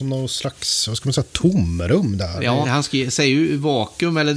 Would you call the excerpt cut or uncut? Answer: cut